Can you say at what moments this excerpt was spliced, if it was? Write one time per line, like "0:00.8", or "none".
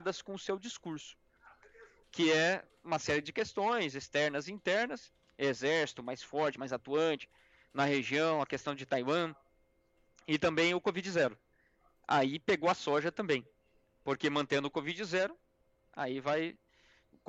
none